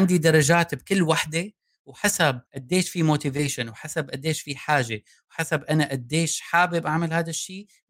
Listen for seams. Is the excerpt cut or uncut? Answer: cut